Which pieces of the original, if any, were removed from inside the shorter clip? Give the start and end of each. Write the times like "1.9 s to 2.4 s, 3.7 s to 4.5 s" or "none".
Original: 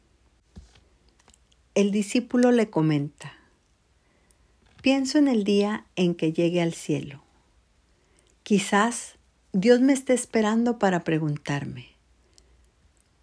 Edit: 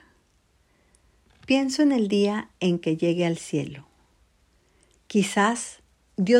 none